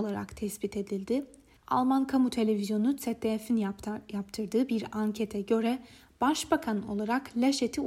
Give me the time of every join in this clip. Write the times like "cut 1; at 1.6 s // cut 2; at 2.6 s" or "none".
cut 1; at 1.6 s

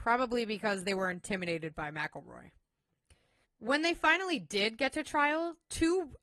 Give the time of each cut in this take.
cut 1; at 3.4 s

